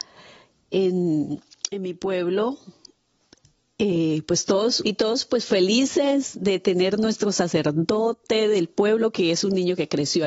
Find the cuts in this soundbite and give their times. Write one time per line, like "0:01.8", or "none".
0:04.8